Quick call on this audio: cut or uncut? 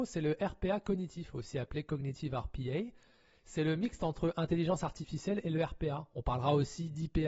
uncut